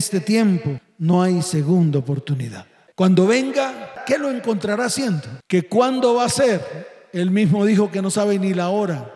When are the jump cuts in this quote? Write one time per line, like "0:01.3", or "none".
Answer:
0:02.9
0:05.4